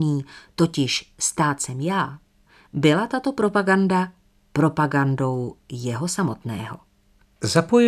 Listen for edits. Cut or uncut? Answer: uncut